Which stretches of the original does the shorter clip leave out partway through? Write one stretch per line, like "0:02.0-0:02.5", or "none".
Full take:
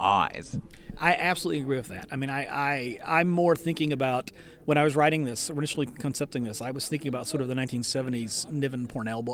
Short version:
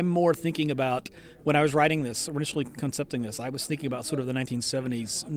none

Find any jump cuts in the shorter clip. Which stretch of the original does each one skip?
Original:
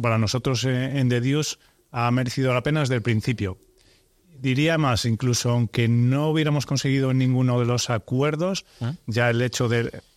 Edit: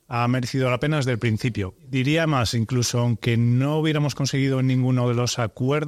0:03.6-0:04.3

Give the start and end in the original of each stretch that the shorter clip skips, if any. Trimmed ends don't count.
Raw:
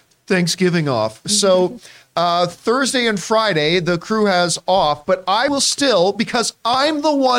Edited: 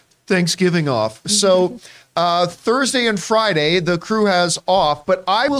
none

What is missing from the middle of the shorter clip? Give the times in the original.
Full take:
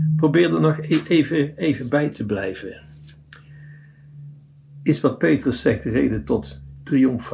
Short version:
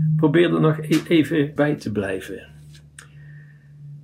0:01.6-0:01.9

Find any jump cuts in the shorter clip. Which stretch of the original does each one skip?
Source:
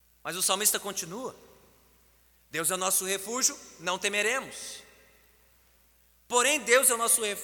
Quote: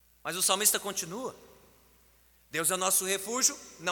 none

